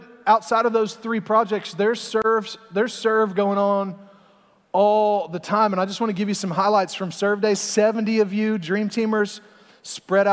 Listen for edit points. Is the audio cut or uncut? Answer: uncut